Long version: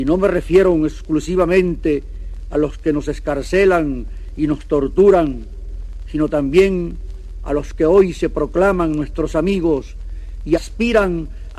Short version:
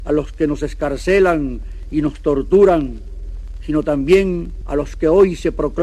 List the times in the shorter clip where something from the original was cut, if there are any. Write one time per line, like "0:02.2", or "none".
0:04.6